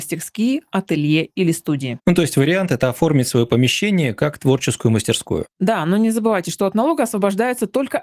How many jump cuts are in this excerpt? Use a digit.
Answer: 0